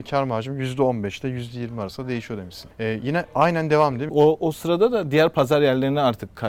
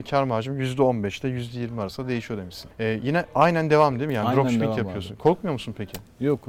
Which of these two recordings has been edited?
first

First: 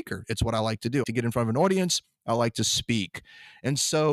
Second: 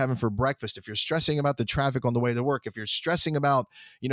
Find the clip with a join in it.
first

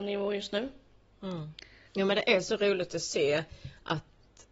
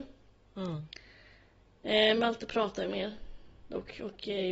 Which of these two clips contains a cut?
first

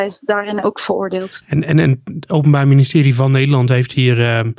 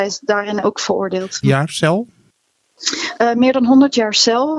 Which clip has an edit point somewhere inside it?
second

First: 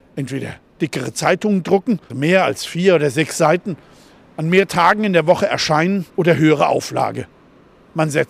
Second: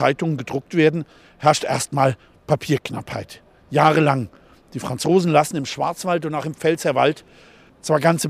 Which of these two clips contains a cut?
first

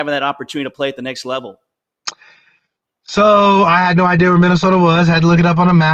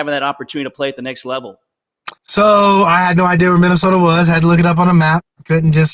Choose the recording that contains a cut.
second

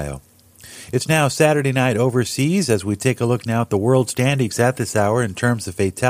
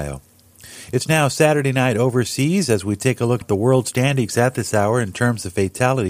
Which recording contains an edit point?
second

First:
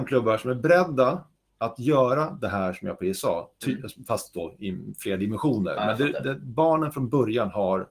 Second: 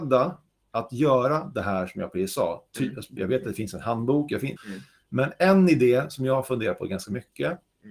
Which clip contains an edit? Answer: second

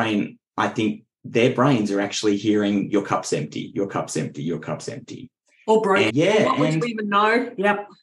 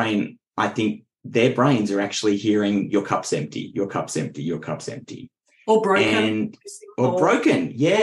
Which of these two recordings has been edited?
first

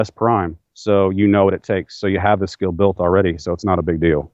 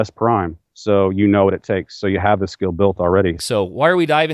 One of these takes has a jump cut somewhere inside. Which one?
second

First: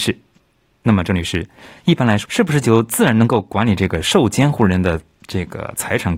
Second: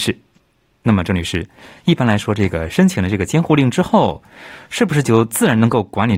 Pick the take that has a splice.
first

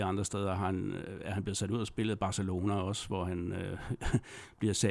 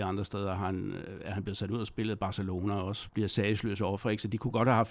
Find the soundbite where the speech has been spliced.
second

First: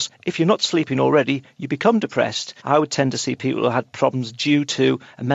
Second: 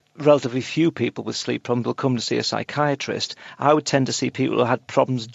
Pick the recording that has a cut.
first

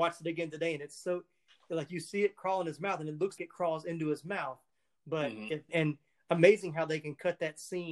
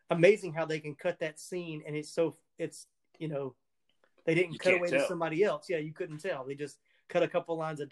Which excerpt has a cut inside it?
first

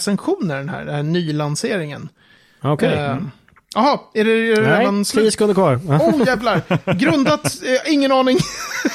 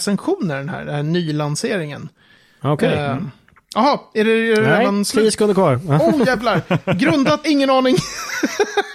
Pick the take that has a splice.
second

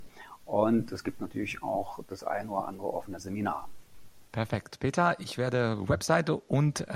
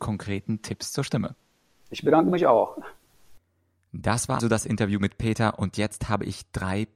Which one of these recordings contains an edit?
second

